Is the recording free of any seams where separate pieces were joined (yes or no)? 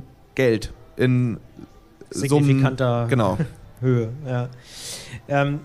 yes